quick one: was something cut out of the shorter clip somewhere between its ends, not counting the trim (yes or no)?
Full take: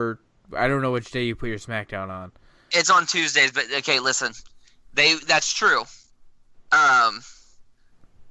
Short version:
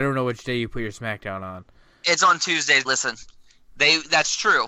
yes